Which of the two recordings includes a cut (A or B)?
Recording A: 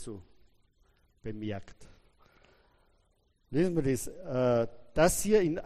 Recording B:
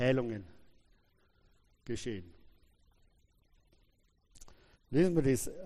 B